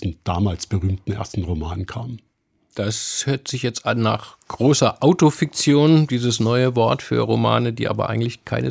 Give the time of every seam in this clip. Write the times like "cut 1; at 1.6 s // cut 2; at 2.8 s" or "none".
none